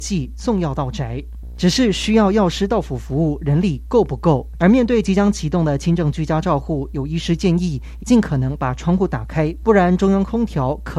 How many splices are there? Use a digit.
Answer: 3